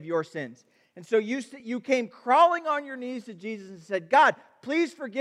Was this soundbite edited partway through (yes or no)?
no